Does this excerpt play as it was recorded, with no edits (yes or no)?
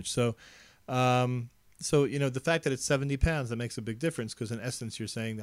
yes